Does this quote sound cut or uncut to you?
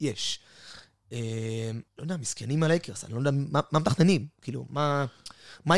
cut